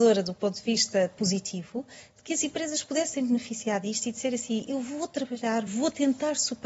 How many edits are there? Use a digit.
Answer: 1